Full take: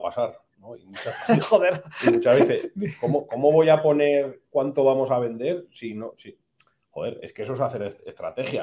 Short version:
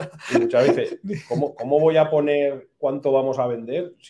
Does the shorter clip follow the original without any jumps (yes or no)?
yes